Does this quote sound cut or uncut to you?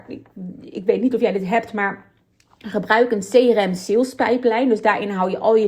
uncut